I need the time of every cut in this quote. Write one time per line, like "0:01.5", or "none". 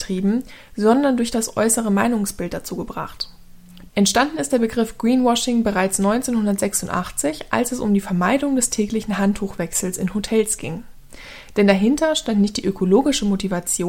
0:03.9